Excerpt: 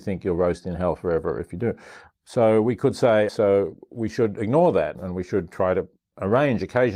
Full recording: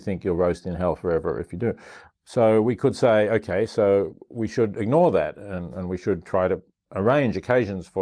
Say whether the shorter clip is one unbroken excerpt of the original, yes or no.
no